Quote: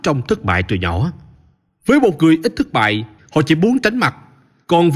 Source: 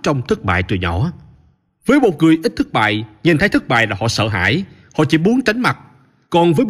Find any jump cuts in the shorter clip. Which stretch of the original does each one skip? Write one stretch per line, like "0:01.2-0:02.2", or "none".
0:03.2-0:04.8